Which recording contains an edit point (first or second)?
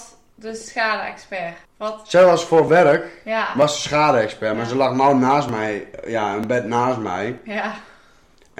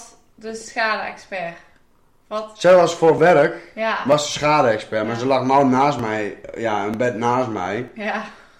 first